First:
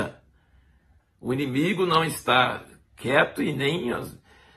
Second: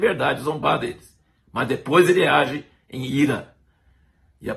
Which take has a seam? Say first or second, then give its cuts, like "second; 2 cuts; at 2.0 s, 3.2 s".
first; 1 cut; at 1.0 s